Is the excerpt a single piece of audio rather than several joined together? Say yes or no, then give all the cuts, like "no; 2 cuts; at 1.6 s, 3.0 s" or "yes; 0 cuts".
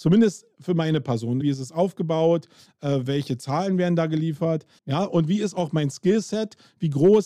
no; 2 cuts; at 1.4 s, 4.8 s